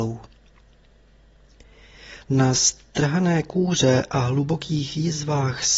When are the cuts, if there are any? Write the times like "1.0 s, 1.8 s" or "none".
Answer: 2.2 s